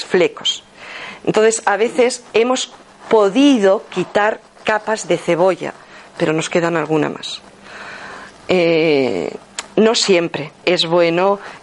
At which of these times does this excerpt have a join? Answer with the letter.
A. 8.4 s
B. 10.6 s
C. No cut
B